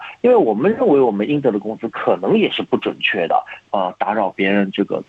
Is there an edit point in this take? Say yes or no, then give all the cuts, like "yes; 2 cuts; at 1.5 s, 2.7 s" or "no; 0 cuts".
yes; 1 cut; at 3.6 s